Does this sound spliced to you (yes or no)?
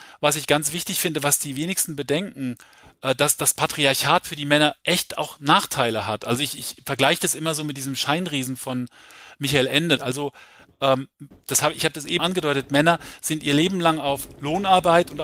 yes